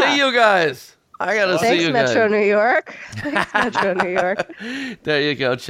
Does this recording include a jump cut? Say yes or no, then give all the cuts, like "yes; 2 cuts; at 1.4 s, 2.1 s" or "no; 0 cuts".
no; 0 cuts